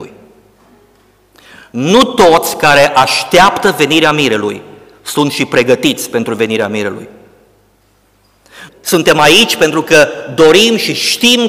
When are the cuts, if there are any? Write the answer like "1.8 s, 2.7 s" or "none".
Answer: 8.7 s